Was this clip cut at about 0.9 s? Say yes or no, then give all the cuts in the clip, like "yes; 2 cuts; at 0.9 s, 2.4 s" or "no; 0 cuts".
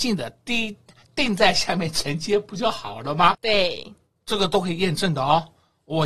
no; 1 cut; at 3.3 s